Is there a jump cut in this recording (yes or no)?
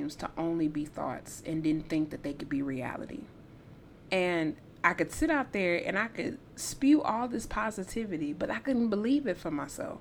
yes